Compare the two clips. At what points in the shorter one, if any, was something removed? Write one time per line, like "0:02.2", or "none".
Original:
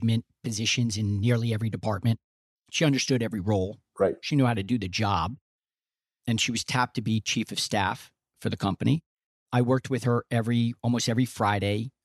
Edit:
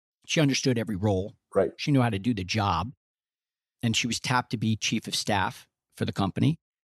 none

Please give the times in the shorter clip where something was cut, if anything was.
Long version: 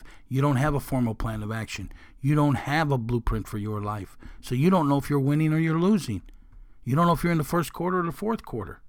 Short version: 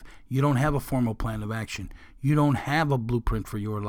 none

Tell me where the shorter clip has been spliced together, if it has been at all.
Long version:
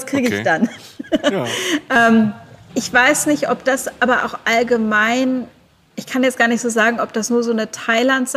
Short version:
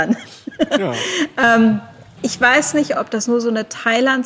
0:02.9

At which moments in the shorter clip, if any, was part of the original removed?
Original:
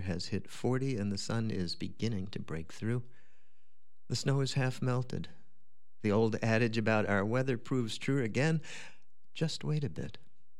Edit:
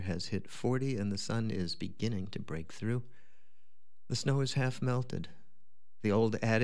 none

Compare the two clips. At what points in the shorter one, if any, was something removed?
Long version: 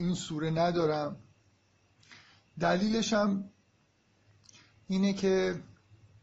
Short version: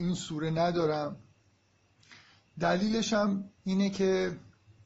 0:03.6

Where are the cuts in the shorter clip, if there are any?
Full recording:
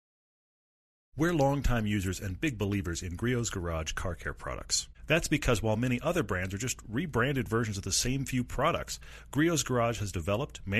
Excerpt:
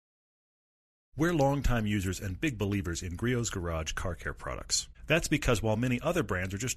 none

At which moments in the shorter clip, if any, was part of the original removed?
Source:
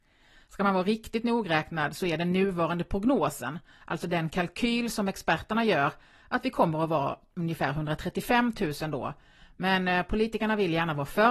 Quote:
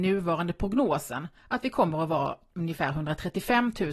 0:01.4

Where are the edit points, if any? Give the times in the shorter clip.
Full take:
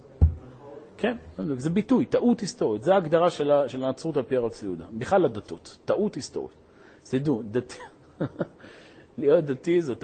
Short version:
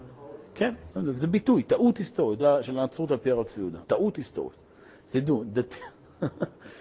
0:02.4
0:03.8

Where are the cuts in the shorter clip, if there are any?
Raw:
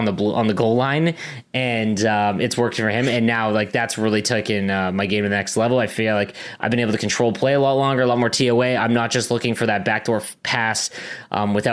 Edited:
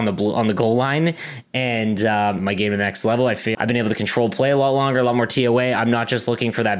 0:02.4
0:03.5

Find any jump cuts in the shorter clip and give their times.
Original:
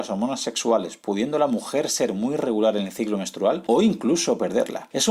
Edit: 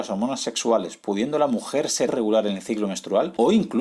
0:02.1

